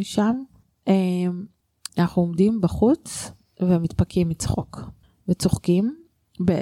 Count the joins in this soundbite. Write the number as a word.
one